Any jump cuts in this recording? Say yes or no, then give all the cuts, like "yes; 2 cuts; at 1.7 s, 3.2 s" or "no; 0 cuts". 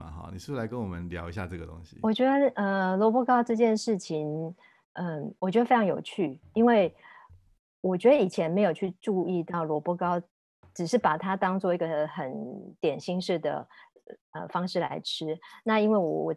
no; 0 cuts